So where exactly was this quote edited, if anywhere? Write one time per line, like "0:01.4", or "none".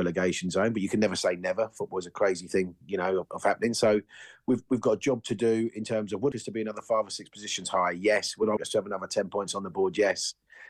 0:04.7
0:06.3
0:08.6